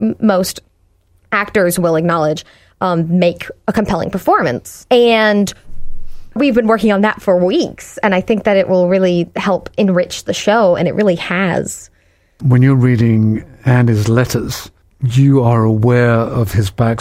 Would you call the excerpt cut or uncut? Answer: uncut